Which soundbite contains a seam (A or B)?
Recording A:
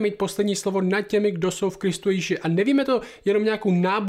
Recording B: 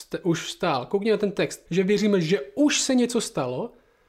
B